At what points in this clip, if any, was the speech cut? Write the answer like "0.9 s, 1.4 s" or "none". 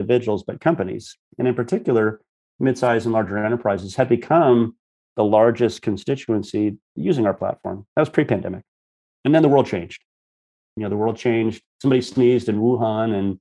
none